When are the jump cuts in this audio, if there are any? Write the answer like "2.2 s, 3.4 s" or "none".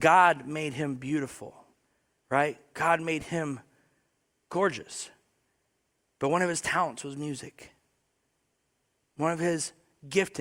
none